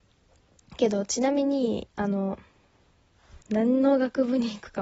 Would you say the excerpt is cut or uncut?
cut